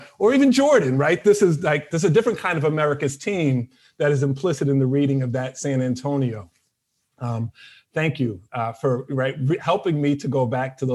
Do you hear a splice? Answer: no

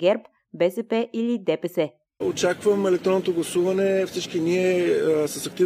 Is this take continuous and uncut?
no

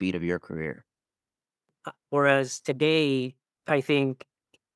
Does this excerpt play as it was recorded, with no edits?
no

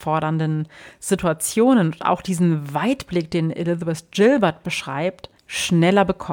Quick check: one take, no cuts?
no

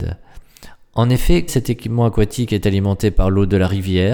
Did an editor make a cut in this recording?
yes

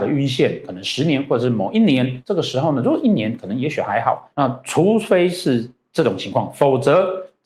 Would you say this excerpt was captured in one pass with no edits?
no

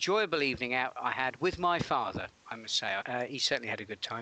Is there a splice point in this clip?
yes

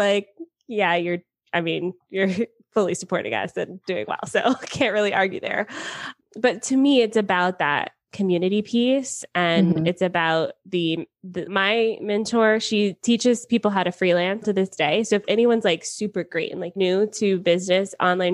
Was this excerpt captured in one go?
no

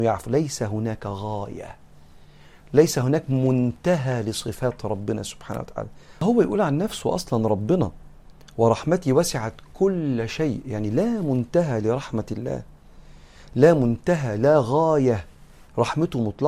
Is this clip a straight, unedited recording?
yes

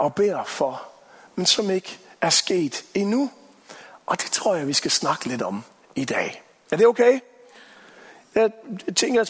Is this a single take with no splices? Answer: yes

